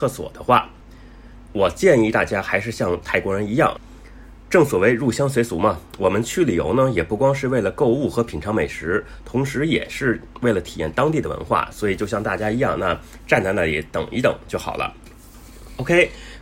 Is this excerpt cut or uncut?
uncut